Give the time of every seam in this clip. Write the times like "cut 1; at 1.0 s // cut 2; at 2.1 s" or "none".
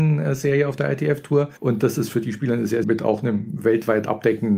cut 1; at 1.6 s // cut 2; at 2.8 s